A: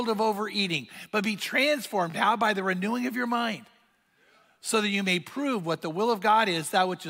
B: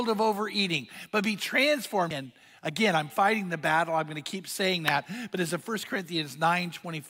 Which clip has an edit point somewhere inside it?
B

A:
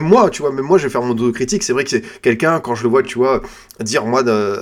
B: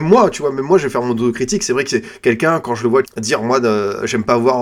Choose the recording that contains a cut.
B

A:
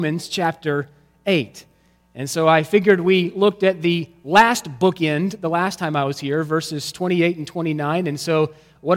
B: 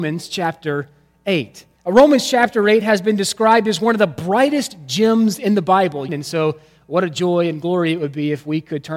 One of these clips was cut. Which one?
B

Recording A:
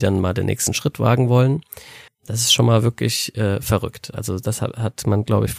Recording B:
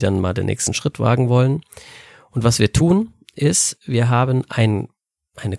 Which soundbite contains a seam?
A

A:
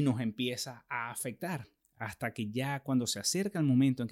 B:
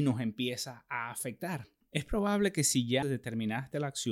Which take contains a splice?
B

